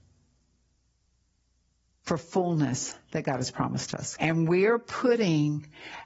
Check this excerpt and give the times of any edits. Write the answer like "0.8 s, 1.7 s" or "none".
4.2 s